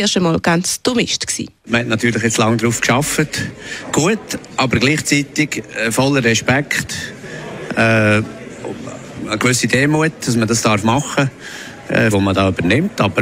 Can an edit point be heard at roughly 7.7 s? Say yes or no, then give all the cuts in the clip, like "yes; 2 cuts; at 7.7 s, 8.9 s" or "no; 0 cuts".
no; 1 cut; at 12.1 s